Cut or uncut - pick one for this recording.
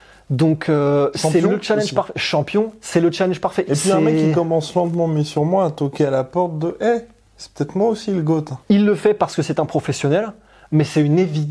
cut